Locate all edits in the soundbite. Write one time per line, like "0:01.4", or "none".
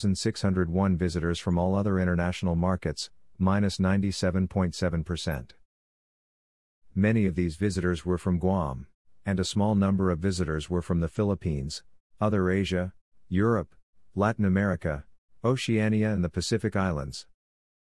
none